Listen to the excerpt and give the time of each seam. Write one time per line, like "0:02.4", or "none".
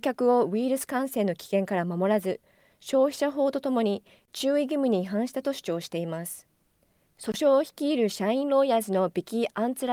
none